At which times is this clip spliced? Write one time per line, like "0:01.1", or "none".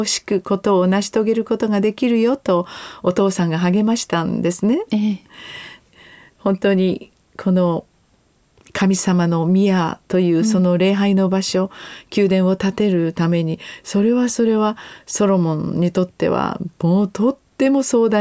0:05.9